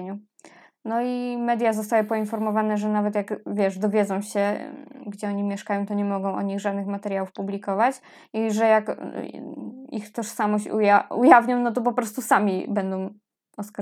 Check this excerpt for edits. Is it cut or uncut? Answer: uncut